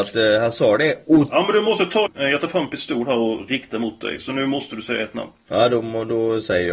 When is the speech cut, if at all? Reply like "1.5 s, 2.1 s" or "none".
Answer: 2.1 s